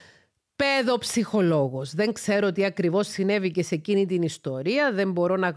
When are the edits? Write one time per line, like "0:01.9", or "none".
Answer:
none

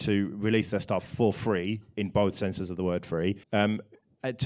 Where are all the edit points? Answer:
0:03.4

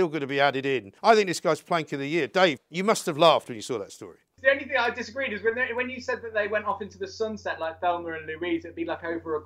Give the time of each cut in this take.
0:01.0
0:02.6

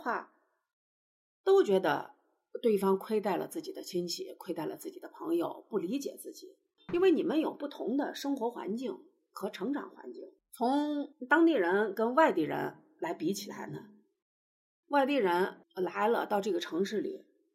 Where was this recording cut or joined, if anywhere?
0:06.8
0:15.6

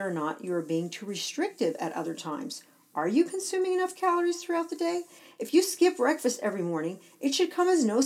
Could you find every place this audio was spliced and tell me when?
none

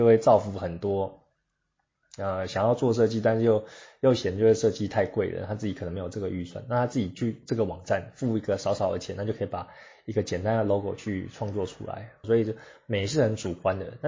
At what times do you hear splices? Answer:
0:12.2

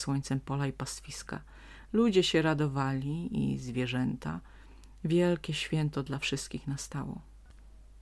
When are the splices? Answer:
0:01.9

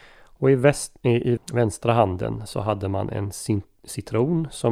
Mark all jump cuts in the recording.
0:01.4

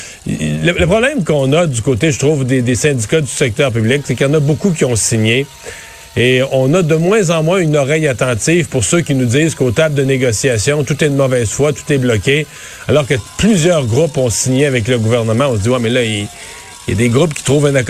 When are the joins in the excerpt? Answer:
none

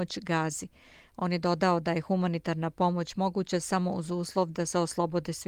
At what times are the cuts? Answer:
none

